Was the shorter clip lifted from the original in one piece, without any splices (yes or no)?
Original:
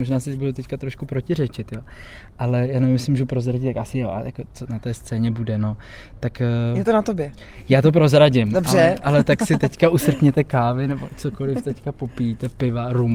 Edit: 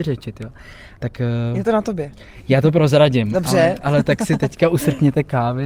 no